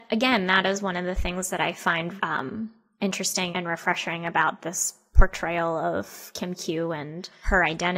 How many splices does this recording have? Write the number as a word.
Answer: two